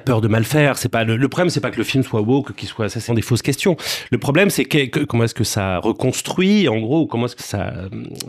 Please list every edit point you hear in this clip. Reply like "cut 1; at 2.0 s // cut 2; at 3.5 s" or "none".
cut 1; at 3.1 s // cut 2; at 5.1 s // cut 3; at 7.4 s